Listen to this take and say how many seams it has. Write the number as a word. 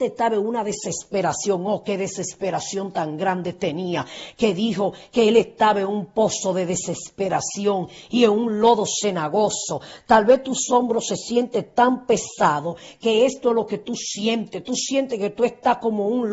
zero